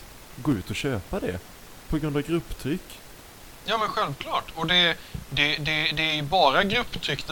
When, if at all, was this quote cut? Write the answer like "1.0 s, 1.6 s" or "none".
none